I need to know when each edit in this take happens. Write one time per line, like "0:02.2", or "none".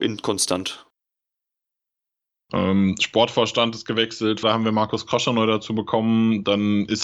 0:02.3
0:04.4